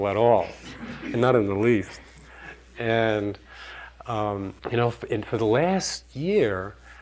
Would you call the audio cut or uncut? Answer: cut